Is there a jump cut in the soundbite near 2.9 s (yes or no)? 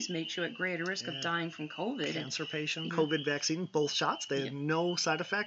yes